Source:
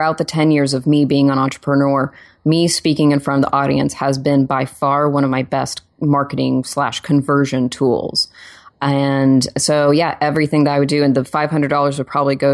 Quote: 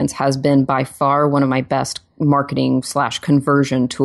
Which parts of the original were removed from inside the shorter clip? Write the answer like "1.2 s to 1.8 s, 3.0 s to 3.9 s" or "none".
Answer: none